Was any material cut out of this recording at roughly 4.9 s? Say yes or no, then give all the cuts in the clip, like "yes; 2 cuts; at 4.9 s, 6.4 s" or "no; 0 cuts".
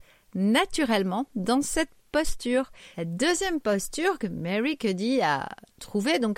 no; 1 cut; at 2.9 s